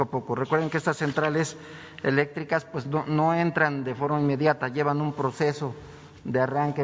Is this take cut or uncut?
uncut